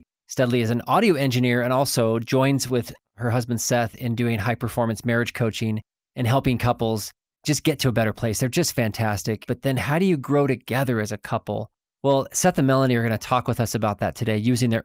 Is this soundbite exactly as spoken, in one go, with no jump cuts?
no; 1 cut; at 9.5 s

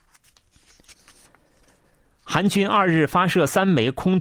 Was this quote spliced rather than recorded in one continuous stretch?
no; 0 cuts

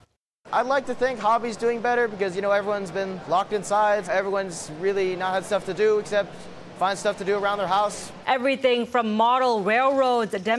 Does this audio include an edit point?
yes; 3 cuts; at 4.0 s, 6.7 s, 8.2 s

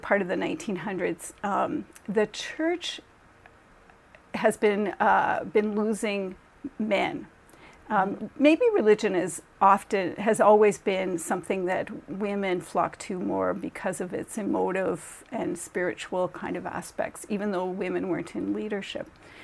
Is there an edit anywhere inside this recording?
no; 0 cuts

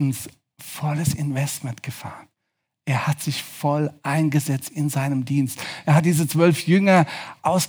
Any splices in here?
no; 0 cuts

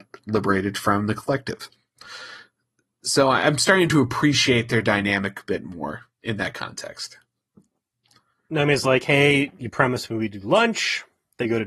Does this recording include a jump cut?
yes; 1 cut; at 6.2 s

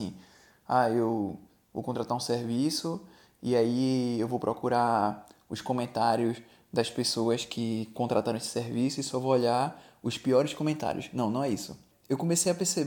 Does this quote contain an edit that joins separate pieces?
no; 0 cuts

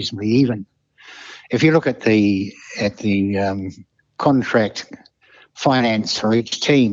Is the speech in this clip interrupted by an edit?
no; 0 cuts

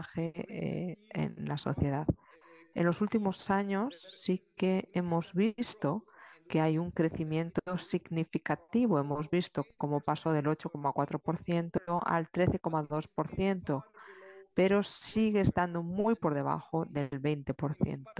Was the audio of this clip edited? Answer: no; 0 cuts

